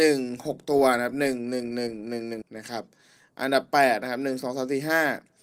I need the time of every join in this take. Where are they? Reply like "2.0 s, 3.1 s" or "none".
2.4 s